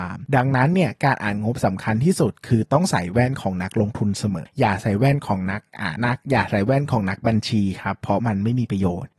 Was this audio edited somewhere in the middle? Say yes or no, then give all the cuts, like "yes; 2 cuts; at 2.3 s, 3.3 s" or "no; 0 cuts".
yes; 2 cuts; at 4.5 s, 6.0 s